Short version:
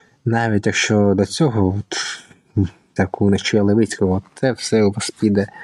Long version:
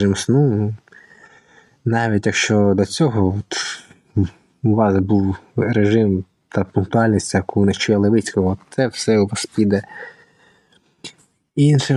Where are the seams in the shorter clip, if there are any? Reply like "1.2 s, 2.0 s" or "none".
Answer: 3.0 s